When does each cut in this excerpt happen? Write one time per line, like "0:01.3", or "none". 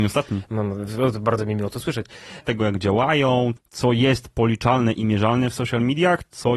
0:02.4
0:03.6